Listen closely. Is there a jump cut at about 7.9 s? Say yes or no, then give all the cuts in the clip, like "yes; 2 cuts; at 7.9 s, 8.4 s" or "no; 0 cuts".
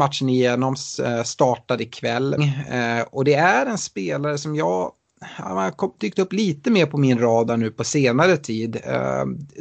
no; 1 cut; at 2.4 s